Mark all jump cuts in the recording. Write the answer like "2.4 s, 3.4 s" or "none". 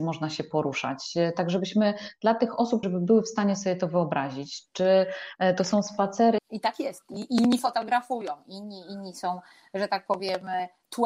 2.8 s, 6.4 s